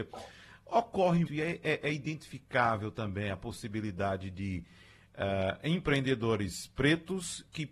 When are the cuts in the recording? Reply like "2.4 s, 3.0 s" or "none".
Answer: 1.3 s